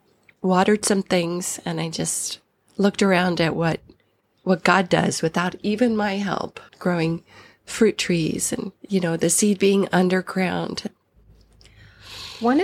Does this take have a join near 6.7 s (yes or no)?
yes